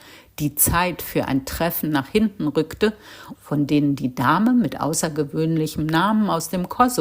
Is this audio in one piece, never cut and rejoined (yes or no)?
no